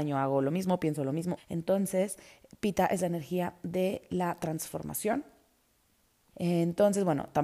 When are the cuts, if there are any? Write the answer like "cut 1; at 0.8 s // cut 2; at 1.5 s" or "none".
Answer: cut 1; at 1.4 s // cut 2; at 6.3 s

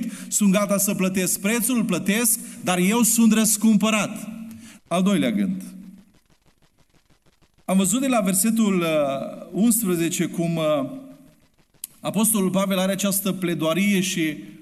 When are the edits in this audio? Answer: cut 1; at 4.8 s

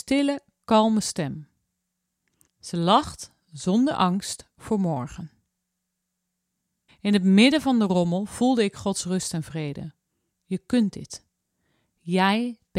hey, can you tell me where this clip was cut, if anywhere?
cut 1; at 2.5 s // cut 2; at 6.9 s // cut 3; at 10.3 s

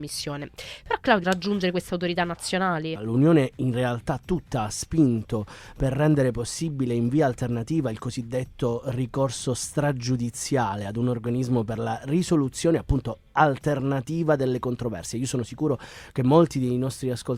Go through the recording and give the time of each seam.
cut 1; at 1.2 s // cut 2; at 3.0 s

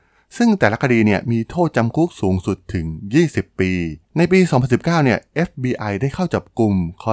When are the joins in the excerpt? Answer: cut 1; at 4.0 s

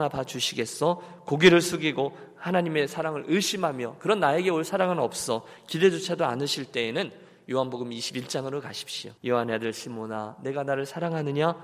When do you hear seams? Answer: cut 1; at 9.2 s

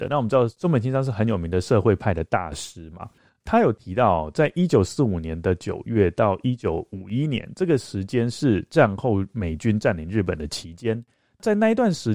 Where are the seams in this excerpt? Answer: none

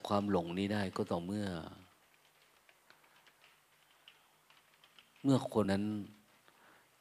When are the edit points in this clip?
cut 1; at 5.6 s

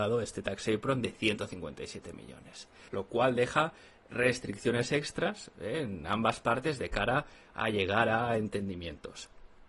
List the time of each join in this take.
cut 1; at 2.9 s

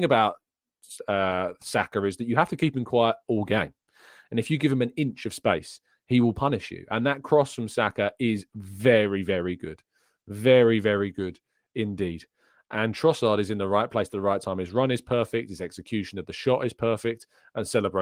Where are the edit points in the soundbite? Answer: none

